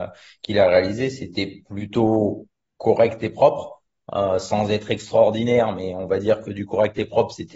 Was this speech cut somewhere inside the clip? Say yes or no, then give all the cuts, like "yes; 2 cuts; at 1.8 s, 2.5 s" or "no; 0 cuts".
no; 0 cuts